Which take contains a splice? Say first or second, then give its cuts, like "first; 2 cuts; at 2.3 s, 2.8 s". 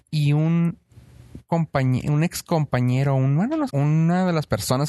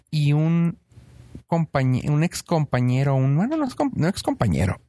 first; 1 cut; at 3.7 s